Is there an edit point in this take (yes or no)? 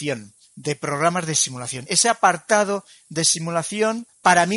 no